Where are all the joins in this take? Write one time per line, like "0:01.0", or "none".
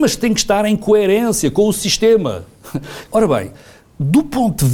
0:03.1